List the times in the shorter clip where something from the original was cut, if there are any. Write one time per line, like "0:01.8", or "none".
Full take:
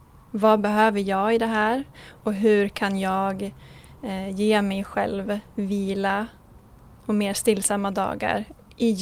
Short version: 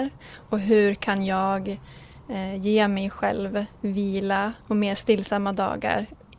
0:04.6